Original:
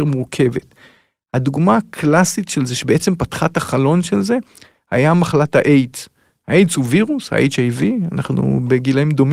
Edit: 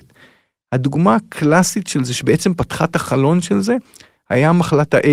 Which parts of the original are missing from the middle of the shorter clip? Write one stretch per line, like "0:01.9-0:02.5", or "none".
none